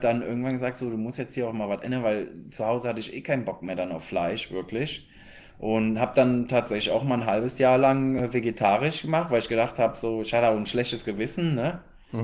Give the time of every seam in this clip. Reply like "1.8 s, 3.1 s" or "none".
none